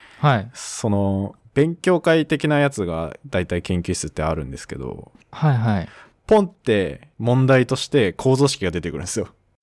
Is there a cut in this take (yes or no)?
no